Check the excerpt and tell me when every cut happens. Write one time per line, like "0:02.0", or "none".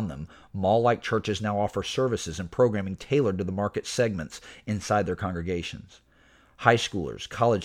none